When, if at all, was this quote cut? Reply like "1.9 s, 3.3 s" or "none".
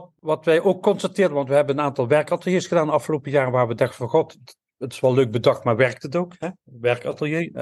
none